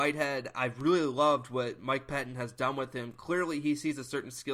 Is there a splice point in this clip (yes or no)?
no